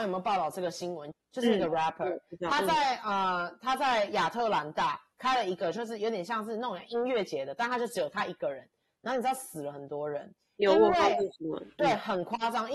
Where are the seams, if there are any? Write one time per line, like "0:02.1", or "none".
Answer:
0:01.1